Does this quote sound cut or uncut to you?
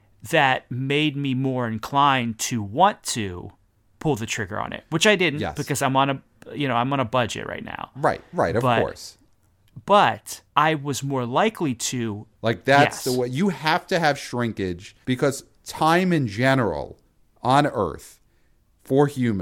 cut